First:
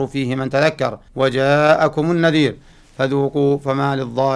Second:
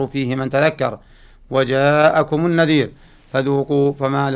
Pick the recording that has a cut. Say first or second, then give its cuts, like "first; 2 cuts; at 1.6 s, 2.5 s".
first; 1 cut; at 1.1 s